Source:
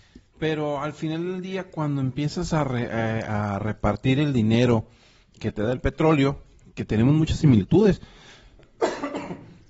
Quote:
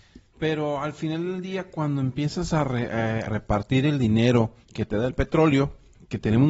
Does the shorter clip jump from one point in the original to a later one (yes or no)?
yes